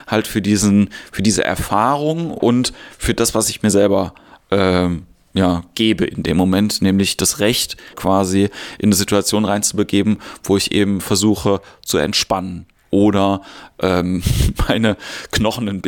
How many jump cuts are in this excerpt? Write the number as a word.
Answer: one